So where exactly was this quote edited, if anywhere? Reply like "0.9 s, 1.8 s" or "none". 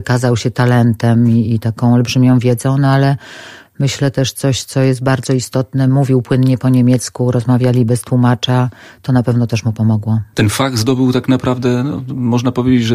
none